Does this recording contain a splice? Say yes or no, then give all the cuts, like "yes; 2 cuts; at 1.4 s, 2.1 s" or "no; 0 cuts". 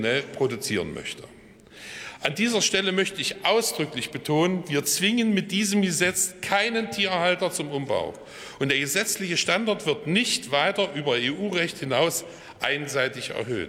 no; 0 cuts